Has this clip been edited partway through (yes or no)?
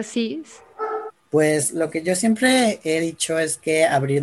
yes